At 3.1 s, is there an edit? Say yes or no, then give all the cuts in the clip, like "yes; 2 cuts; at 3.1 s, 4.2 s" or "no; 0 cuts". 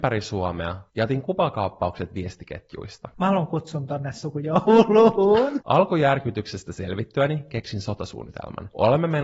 yes; 2 cuts; at 3.1 s, 5.6 s